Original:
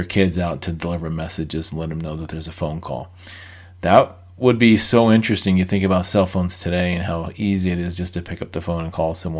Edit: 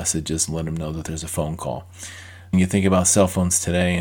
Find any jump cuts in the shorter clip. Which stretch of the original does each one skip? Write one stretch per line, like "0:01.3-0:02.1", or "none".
0:03.8-0:05.5